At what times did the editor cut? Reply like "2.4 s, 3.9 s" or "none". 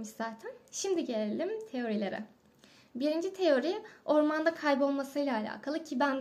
none